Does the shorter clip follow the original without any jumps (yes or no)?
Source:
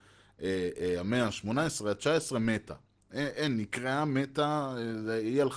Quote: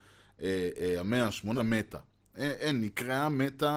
no